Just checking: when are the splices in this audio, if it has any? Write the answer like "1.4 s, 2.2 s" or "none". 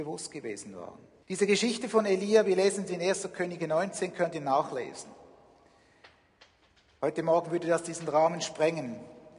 1.2 s